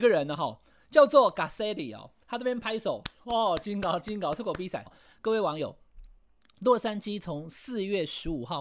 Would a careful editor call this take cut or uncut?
cut